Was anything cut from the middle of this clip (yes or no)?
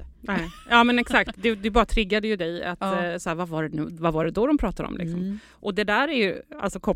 no